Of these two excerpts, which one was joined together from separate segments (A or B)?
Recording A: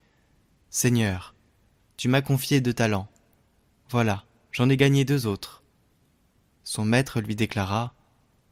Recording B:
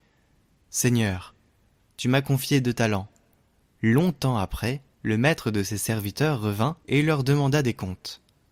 B